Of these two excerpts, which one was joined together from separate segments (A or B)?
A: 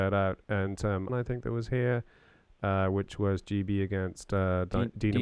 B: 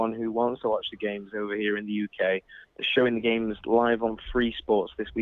A